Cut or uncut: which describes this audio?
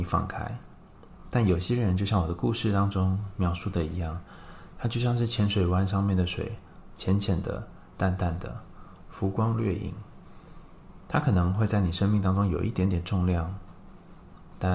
uncut